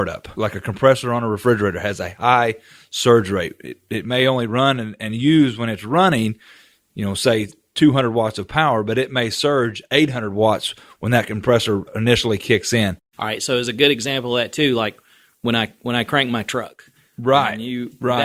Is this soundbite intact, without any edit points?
yes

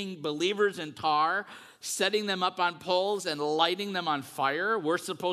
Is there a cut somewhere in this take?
no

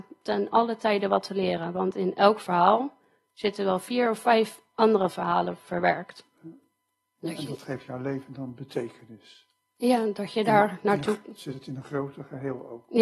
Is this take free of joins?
yes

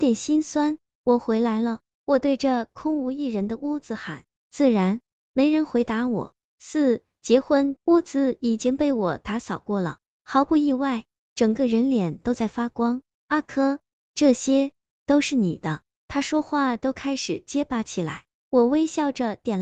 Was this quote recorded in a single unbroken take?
no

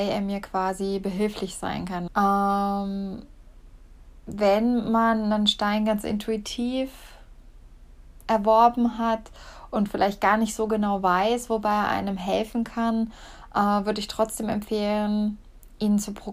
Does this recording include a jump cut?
yes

